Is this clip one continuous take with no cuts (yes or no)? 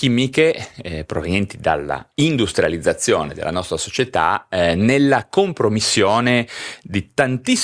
no